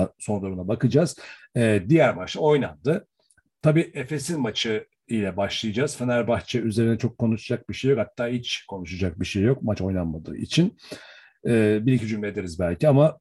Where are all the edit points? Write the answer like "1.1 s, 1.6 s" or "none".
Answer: 1.4 s